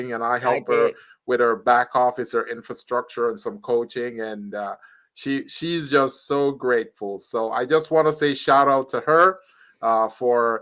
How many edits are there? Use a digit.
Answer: 0